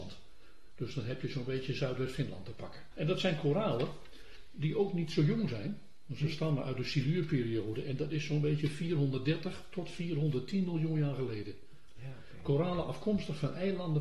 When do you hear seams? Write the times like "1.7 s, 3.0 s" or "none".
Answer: 2.9 s, 11.9 s